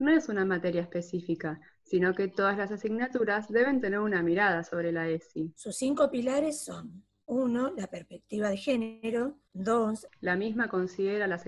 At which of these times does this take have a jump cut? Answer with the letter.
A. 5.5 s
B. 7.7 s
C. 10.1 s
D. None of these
C